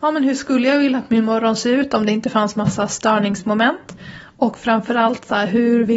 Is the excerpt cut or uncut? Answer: uncut